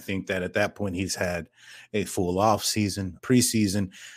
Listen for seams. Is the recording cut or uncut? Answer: cut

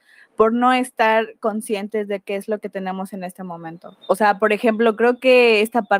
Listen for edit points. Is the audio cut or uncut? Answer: uncut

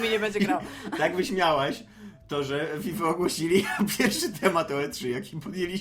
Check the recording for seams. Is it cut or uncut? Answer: uncut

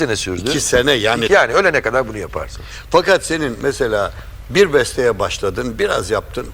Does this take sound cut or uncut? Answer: cut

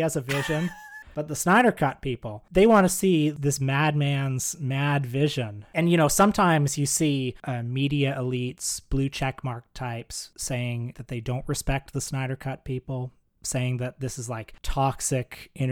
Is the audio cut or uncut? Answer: cut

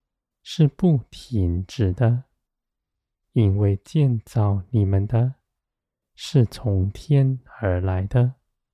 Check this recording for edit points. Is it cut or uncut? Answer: uncut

